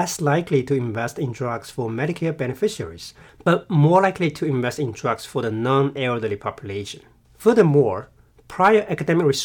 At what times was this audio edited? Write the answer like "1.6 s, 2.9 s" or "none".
7.2 s